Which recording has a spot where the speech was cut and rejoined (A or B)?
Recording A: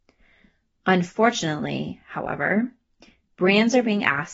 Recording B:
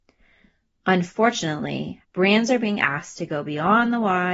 B